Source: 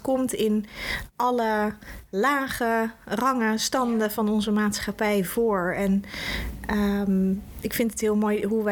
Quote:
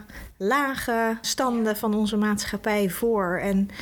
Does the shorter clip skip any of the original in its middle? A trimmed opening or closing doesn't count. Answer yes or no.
yes